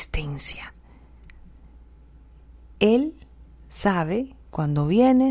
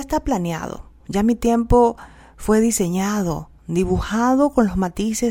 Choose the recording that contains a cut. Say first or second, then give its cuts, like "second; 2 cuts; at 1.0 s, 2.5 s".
second; 2 cuts; at 1.0 s, 3.6 s